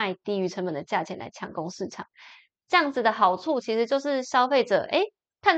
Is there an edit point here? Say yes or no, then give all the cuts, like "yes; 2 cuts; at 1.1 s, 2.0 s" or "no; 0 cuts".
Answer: no; 0 cuts